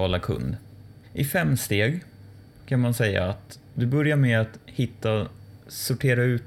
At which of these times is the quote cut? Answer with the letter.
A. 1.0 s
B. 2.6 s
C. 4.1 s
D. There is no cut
A